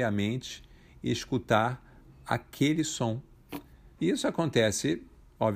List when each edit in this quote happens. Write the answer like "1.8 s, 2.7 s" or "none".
3.9 s